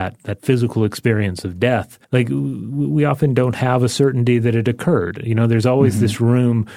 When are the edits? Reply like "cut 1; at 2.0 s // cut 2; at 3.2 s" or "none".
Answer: cut 1; at 2.0 s